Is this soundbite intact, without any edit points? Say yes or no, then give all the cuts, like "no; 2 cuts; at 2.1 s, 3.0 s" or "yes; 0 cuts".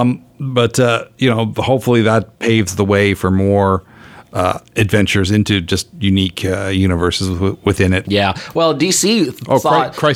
no; 1 cut; at 8.0 s